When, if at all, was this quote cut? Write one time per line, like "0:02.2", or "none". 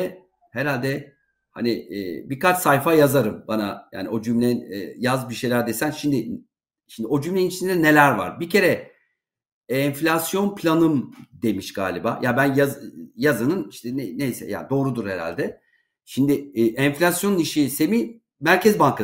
none

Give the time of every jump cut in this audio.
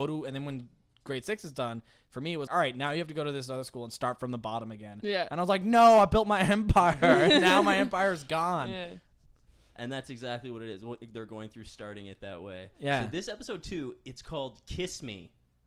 0:02.5

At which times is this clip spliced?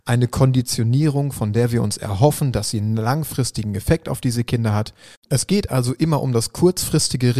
0:05.1

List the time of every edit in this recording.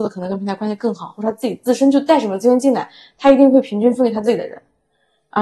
none

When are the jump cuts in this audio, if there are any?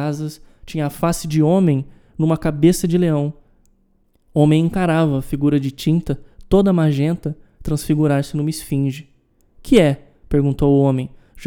none

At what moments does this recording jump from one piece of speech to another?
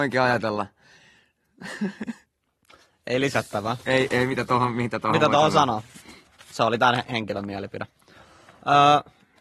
none

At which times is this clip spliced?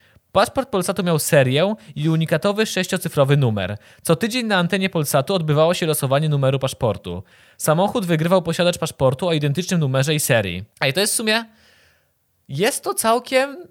0:10.7

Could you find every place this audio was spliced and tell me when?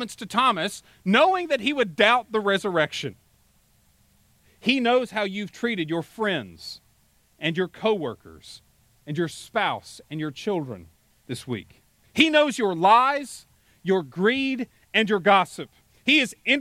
0:04.4
0:12.0

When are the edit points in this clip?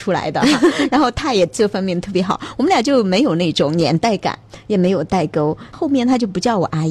none

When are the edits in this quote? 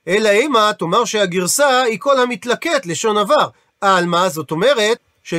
none

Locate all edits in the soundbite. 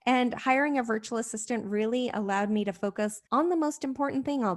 0:03.3

